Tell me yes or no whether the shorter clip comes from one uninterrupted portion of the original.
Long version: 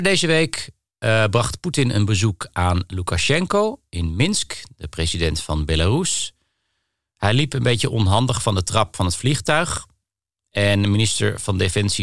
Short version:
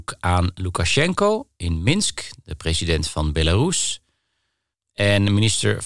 no